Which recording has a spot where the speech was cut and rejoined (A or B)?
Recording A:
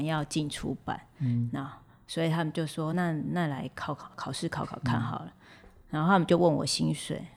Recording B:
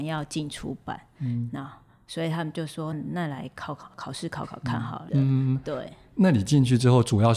B